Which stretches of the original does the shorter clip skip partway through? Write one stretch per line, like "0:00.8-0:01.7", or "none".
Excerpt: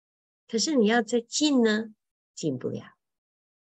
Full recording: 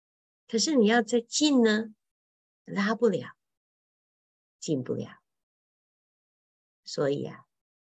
0:02.2-0:04.5